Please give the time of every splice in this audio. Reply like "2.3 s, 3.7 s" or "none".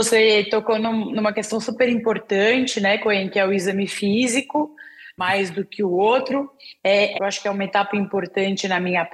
5.2 s, 7.1 s